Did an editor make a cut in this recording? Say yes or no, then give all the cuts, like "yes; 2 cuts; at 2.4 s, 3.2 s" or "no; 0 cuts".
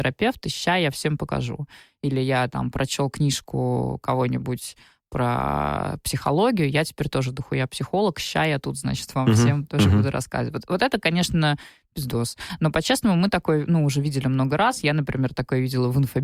no; 0 cuts